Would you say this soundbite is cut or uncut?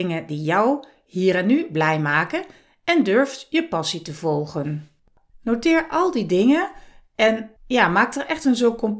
cut